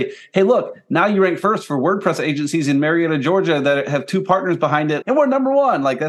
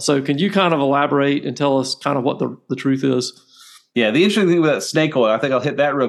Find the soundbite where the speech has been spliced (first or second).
first